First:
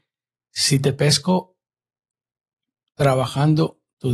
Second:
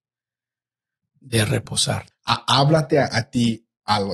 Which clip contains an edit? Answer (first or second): second